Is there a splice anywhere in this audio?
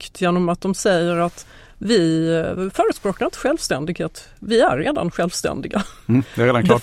no; 0 cuts

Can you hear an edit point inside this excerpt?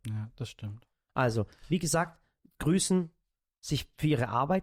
no; 0 cuts

